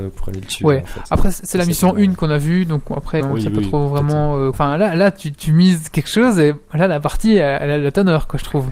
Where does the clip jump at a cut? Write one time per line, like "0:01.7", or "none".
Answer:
0:03.2
0:04.5

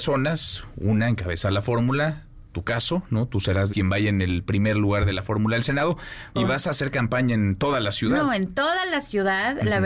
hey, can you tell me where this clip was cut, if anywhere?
0:03.7
0:06.3

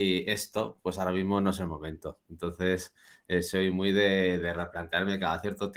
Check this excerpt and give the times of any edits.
none

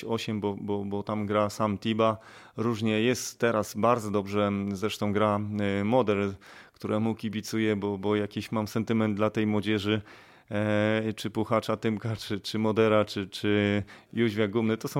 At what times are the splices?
none

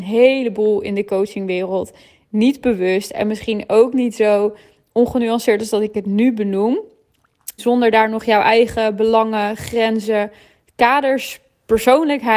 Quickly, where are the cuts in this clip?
0:07.6

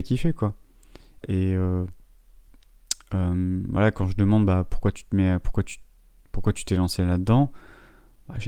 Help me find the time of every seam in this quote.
0:01.2

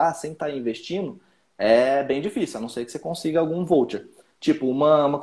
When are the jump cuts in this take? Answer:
none

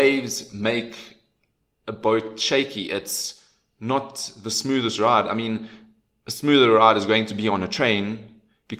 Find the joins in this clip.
none

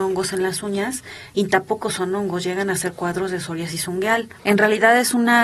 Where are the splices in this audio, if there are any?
0:04.4

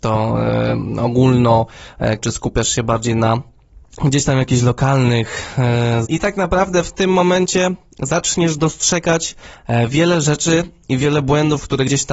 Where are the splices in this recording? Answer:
0:02.2
0:06.0

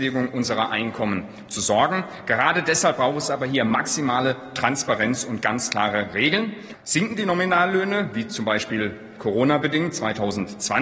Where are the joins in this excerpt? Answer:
0:06.7

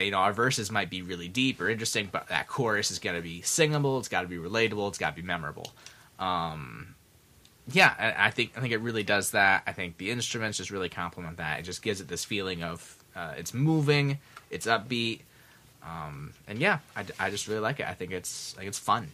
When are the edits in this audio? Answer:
none

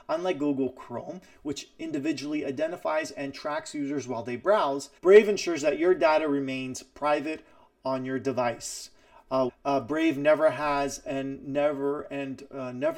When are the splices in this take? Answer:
0:05.0
0:09.5

